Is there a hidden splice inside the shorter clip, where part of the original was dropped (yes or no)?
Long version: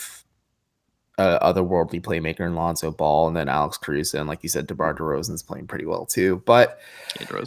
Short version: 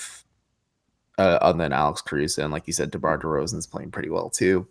yes